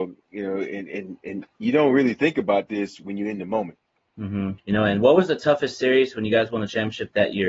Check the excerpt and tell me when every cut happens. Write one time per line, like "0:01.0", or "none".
0:04.6